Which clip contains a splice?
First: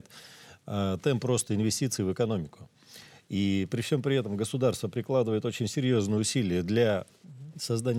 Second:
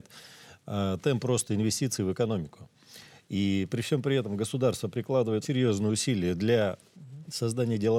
second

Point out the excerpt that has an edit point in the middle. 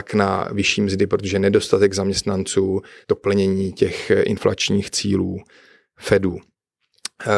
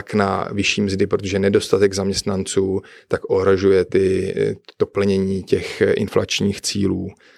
first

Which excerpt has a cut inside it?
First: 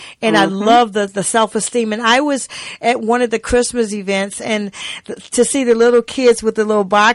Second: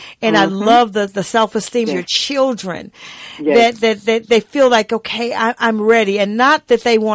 second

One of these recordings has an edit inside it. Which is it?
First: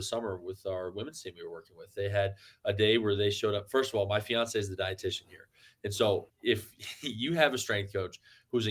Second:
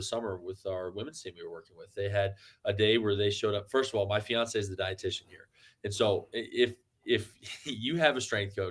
first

